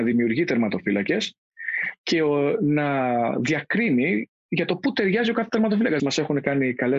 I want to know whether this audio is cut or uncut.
cut